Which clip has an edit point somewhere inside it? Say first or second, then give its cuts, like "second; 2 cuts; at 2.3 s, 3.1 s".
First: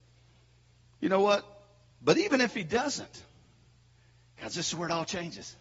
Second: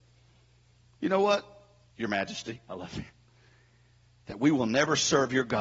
second; 1 cut; at 1.9 s